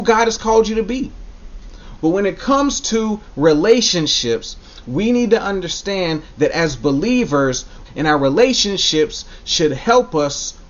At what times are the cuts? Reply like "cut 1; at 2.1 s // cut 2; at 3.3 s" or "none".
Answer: cut 1; at 2.0 s // cut 2; at 7.8 s